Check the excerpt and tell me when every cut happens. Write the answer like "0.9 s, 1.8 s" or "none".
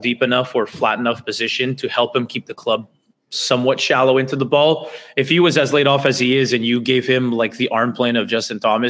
none